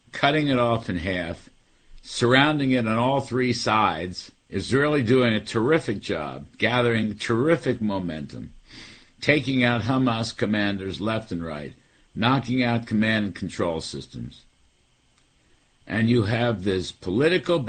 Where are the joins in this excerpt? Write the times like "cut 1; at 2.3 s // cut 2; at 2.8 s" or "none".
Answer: cut 1; at 4.4 s // cut 2; at 6.5 s

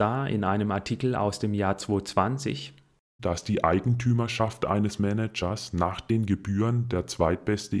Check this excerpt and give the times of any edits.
cut 1; at 3.2 s

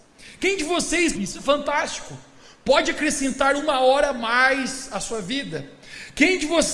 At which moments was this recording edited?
cut 1; at 1.1 s

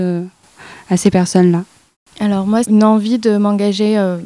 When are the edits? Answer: cut 1; at 2.6 s

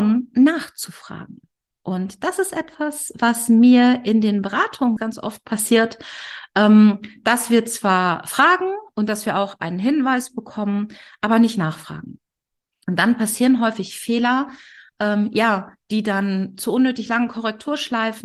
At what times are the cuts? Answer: cut 1; at 5.0 s

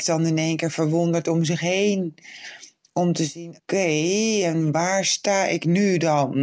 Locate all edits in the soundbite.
cut 1; at 3.6 s

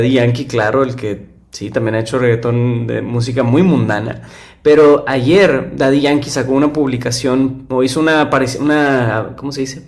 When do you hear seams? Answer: none

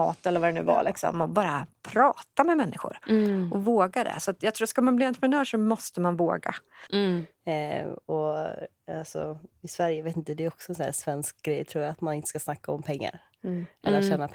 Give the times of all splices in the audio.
cut 1; at 6.9 s

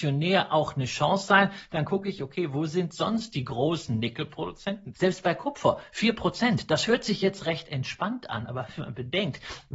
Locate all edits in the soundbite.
cut 1; at 4.9 s

